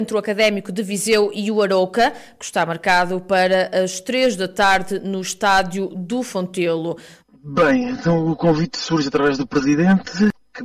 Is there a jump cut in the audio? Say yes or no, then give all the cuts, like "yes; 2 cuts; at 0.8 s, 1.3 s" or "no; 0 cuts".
yes; 1 cut; at 7.2 s